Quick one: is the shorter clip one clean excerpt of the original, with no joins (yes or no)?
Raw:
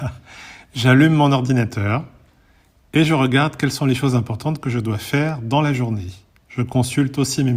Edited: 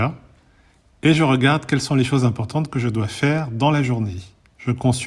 yes